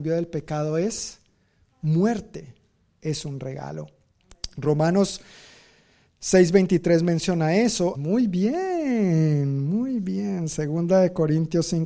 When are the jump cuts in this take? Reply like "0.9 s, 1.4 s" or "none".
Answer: 3.0 s, 7.9 s